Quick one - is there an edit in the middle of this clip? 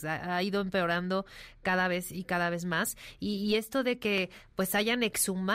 no; 0 cuts

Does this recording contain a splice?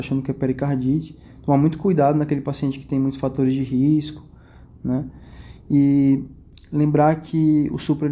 no; 0 cuts

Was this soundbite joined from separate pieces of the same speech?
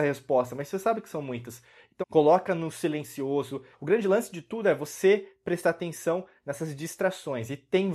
yes; 2 cuts; at 2.0 s, 3.7 s

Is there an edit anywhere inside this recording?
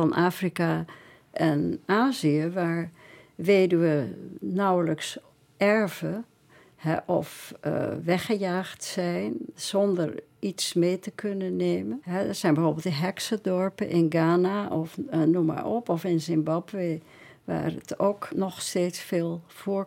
yes; 2 cuts; at 12.0 s, 18.3 s

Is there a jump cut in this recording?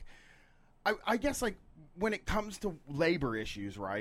yes; 1 cut; at 1.0 s

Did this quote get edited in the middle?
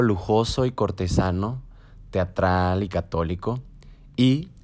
no; 0 cuts

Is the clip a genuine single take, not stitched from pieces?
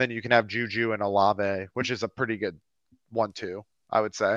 yes; 0 cuts

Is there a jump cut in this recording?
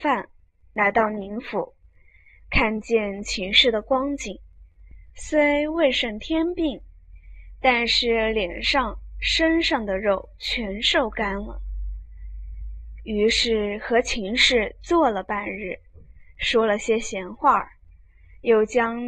no; 0 cuts

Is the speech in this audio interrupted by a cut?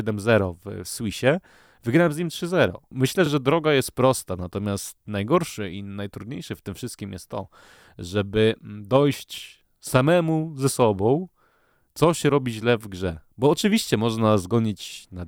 no; 0 cuts

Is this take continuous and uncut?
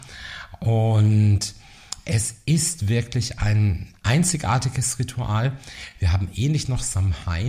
yes; 0 cuts

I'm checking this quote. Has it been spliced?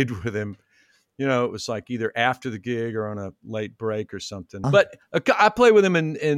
yes; 1 cut; at 4.6 s

